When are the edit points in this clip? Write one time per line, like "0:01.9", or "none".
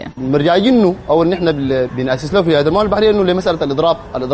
0:01.9